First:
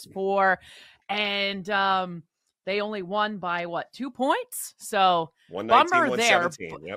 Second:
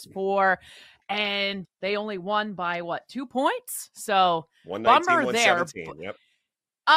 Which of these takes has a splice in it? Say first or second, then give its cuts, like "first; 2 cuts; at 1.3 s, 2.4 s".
second; 1 cut; at 1.6 s